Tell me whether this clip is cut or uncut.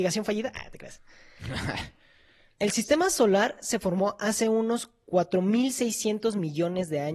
uncut